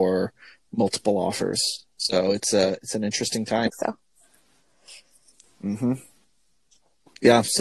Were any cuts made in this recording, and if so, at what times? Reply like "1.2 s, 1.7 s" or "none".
3.7 s